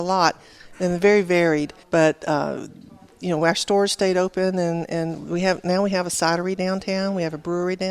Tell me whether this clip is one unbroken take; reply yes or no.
no